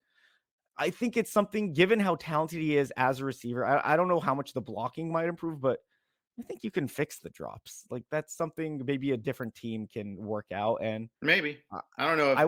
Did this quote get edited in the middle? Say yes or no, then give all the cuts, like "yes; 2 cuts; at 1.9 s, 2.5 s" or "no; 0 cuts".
yes; 1 cut; at 11.2 s